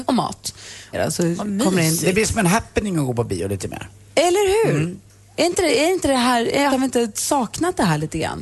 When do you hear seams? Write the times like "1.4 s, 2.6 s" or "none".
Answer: 0.9 s, 6.7 s